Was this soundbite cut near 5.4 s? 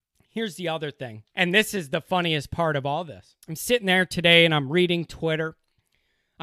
no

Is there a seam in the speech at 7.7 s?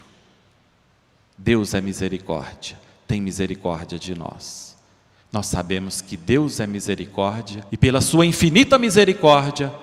yes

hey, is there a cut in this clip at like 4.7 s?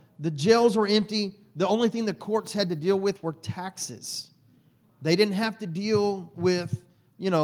no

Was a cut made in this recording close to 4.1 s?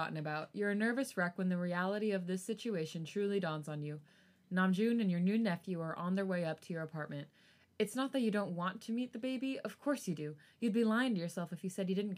no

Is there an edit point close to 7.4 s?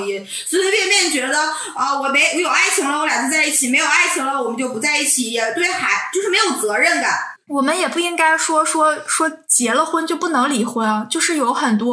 yes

